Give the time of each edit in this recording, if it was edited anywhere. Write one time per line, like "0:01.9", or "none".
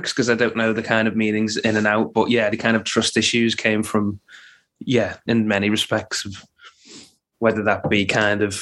0:02.5
0:05.3